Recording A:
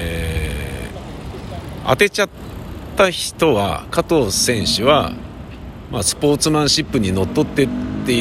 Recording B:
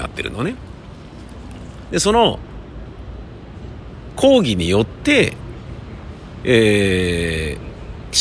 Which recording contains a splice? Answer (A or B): B